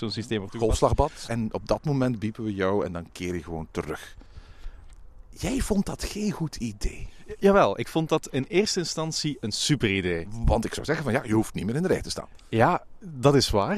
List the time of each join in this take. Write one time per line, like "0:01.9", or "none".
0:01.3